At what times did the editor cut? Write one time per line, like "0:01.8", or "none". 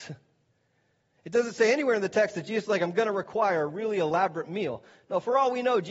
none